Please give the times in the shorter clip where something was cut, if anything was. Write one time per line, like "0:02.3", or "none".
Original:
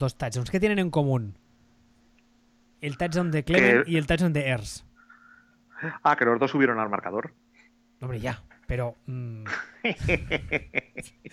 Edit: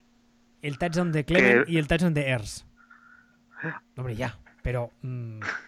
0:03.8